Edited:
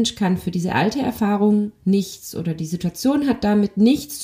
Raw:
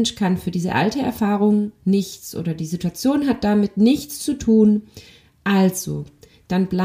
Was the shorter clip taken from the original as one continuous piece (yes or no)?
yes